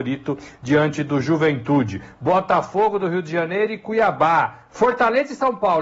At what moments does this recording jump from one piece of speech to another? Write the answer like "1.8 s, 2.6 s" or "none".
4.7 s